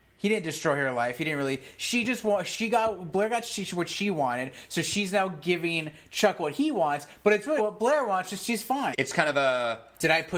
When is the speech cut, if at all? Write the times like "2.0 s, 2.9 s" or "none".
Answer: 7.6 s, 8.9 s

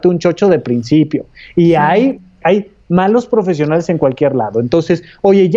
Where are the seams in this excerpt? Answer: 2.4 s

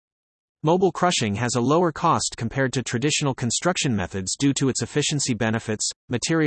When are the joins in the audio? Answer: none

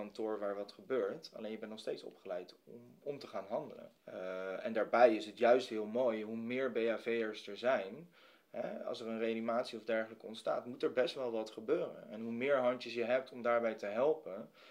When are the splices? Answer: 4.0 s

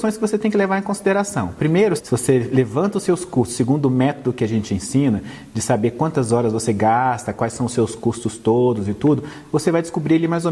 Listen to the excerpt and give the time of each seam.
2.0 s

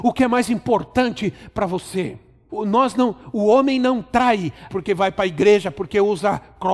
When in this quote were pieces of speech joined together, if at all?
2.5 s, 4.7 s

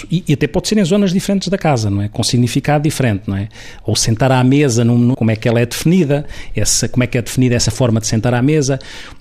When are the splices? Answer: 5.1 s

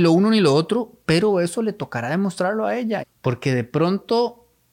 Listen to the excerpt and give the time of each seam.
3.0 s

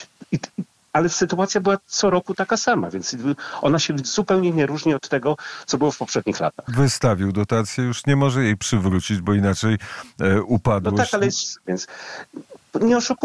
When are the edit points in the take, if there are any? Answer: 6.7 s, 11.6 s

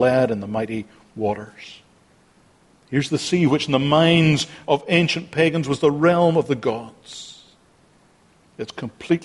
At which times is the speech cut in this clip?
none

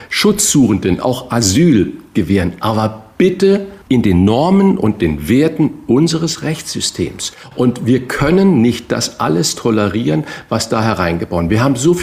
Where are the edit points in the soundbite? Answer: 3.8 s

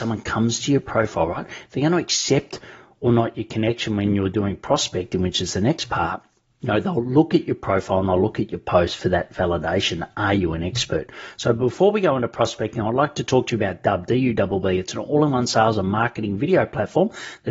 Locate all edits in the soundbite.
none

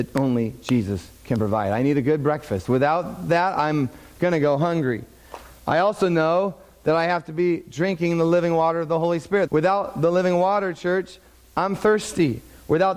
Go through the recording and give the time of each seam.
9.5 s

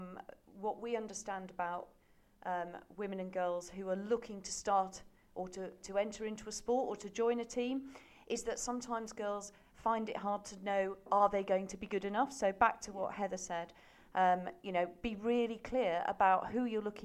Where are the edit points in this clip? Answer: none

